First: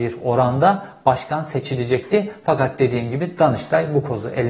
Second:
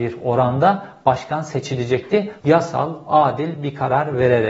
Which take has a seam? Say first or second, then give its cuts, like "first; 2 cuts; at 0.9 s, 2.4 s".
second; 1 cut; at 2.4 s